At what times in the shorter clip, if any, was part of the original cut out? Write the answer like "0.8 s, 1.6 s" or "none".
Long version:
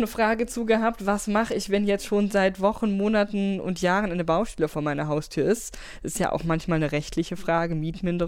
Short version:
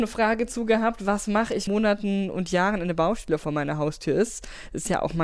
1.7 s